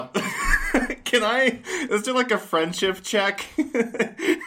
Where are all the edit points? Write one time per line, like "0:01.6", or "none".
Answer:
none